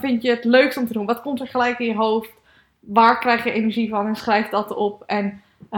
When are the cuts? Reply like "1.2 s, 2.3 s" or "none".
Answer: none